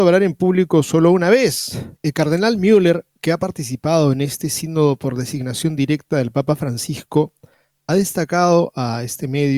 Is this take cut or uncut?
cut